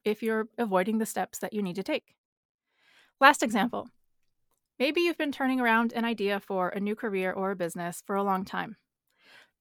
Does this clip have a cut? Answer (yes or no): no